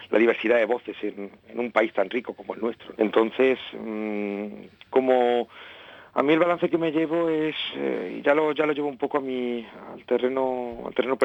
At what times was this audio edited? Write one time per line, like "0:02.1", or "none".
0:02.9